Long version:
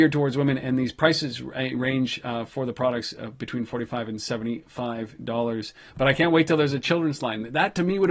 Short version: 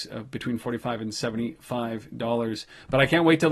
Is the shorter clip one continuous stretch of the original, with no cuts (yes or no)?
yes